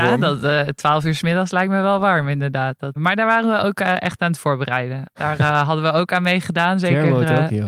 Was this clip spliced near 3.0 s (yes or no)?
yes